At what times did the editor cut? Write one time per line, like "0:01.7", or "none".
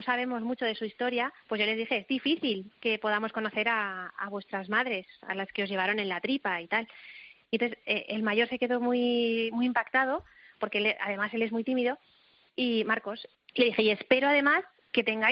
0:01.4
0:07.4